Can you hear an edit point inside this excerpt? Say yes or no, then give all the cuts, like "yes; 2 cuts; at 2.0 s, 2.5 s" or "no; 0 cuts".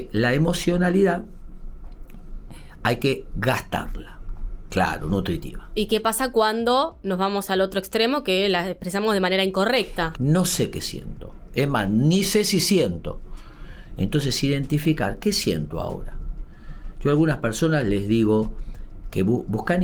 yes; 2 cuts; at 4.7 s, 10.1 s